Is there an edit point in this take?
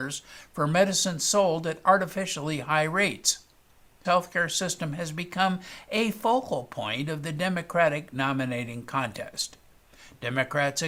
yes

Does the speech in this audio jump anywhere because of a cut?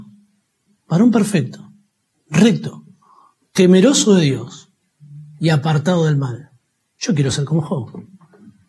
no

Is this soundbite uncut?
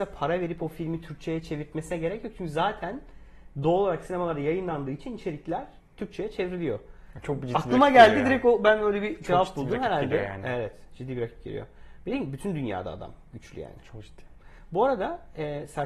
yes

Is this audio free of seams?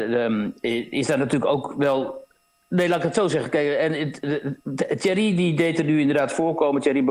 yes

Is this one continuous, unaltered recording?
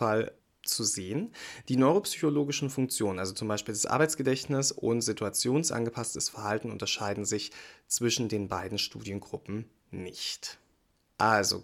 yes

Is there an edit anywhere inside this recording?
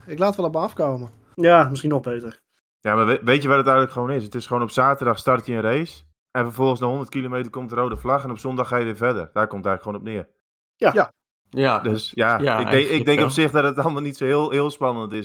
no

